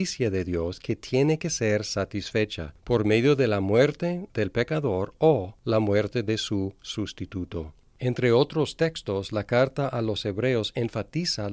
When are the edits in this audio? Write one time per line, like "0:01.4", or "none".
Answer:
none